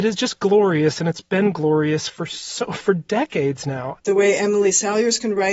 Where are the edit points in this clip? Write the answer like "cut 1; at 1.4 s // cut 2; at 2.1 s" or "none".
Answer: cut 1; at 4.0 s

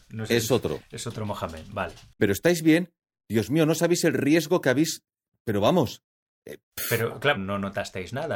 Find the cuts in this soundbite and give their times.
cut 1; at 2.2 s // cut 2; at 7.4 s

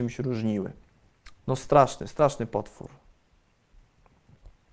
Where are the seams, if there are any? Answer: cut 1; at 1.4 s

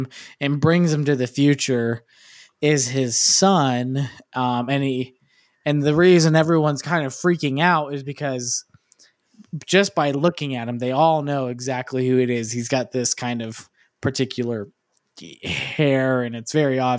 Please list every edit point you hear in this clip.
none

